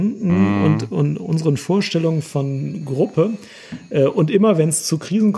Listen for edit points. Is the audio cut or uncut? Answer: uncut